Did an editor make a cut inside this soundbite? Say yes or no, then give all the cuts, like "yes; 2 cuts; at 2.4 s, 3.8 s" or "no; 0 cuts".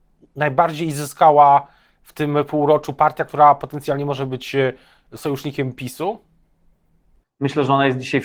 yes; 1 cut; at 7.2 s